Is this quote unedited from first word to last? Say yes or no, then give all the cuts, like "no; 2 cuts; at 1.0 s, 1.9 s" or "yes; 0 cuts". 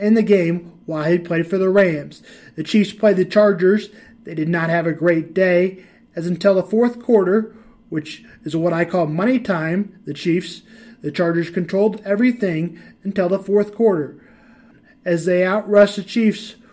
yes; 0 cuts